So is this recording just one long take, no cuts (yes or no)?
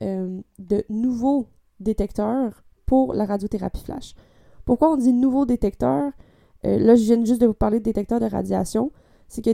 yes